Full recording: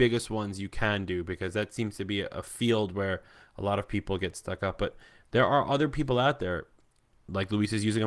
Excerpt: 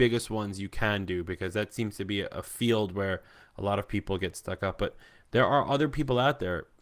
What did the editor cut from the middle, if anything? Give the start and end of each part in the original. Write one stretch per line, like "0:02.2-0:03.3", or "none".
none